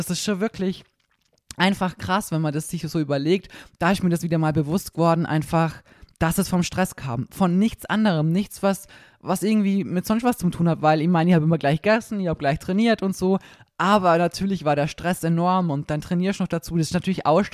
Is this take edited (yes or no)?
no